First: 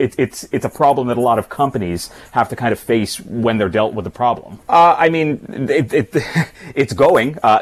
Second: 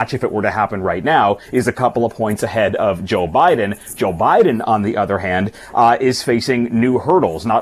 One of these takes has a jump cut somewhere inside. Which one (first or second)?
first